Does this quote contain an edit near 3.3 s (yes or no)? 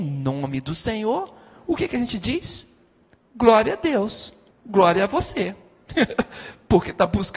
no